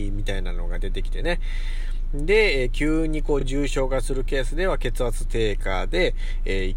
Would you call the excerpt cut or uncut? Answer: uncut